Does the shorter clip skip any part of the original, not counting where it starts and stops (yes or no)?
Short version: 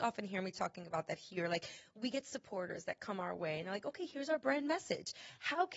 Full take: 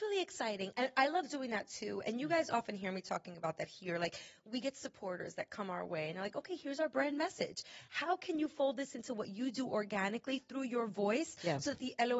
no